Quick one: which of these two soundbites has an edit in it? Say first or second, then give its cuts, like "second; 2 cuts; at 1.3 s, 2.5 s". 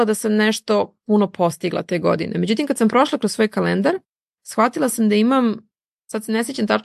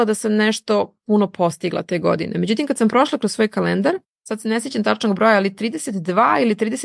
second; 1 cut; at 4.1 s